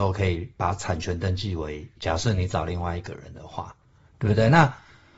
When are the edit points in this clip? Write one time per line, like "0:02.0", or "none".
0:02.0